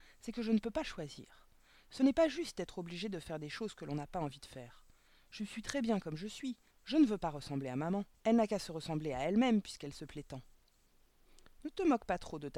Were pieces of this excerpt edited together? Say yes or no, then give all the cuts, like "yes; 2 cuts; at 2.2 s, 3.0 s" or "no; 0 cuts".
yes; 2 cuts; at 6.7 s, 8.1 s